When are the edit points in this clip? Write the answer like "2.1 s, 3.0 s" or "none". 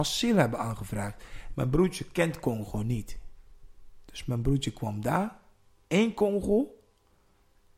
1.5 s